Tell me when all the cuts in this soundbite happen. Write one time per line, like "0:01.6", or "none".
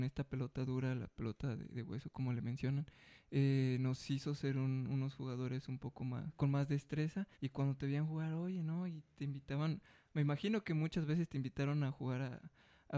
0:07.3